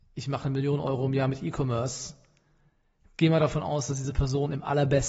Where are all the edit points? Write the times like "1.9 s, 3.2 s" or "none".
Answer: none